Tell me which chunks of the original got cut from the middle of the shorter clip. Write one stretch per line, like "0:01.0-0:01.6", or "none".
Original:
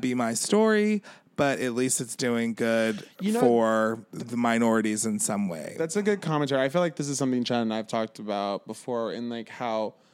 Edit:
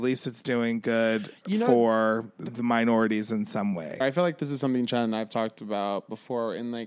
0:05.7-0:06.6